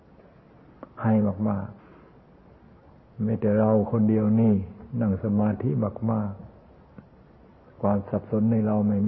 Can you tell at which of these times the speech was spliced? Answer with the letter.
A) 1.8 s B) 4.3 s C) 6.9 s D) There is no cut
A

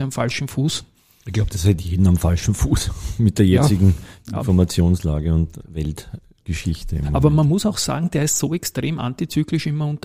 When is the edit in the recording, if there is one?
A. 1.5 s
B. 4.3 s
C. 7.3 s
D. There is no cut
D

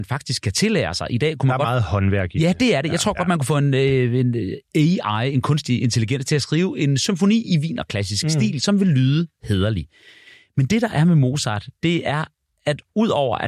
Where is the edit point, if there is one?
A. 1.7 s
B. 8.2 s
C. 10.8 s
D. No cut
D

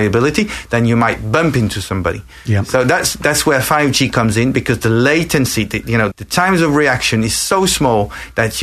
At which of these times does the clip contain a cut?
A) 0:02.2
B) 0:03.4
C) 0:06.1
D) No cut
C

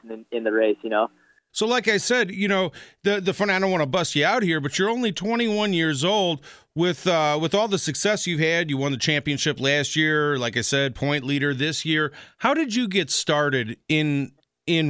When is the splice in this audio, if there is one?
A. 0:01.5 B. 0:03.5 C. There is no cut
A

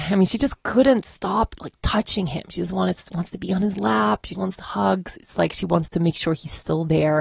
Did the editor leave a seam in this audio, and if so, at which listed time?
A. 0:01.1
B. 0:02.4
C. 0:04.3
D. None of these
C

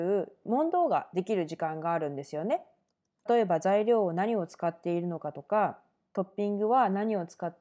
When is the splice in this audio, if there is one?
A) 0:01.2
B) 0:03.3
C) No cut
B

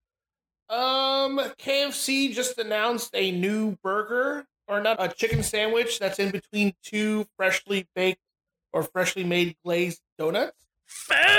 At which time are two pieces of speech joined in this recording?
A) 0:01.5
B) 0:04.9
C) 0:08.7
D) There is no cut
B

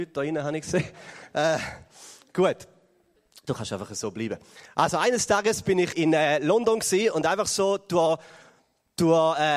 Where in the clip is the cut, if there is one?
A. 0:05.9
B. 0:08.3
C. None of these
A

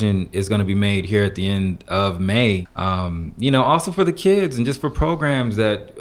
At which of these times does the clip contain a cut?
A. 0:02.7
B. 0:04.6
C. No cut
A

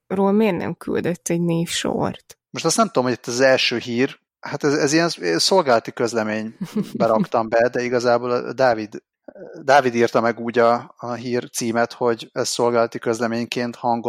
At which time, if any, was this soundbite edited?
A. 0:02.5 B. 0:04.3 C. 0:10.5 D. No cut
A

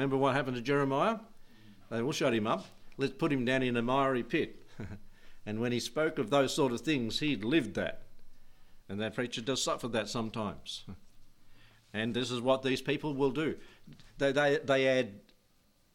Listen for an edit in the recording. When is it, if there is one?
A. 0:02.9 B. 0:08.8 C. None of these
B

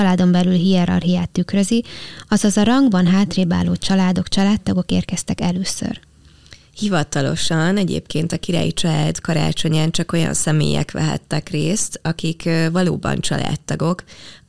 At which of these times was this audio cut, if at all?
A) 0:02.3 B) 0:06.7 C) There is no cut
C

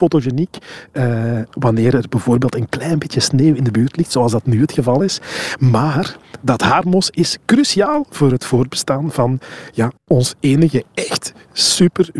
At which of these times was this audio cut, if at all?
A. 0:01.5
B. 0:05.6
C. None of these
C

